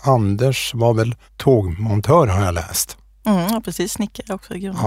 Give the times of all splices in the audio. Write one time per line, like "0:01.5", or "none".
0:01.3

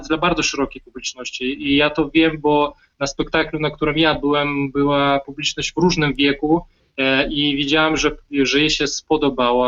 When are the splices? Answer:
none

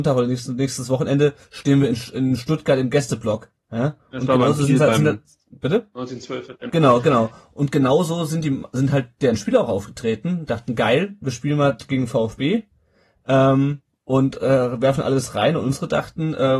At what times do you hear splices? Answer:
0:06.7

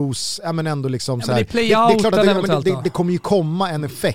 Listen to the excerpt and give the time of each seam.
none

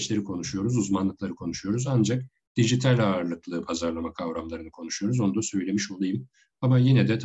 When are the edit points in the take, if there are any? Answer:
none

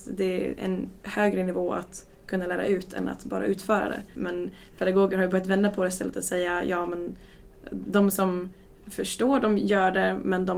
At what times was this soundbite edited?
0:04.1

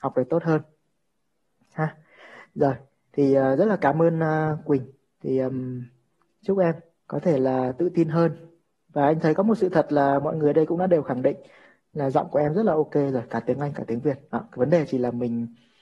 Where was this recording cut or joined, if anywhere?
none

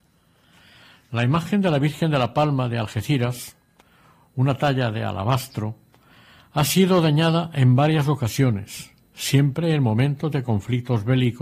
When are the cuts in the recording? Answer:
none

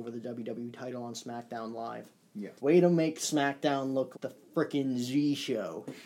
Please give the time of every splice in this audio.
0:02.6
0:04.1

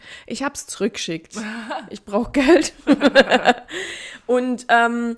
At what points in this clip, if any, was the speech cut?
none

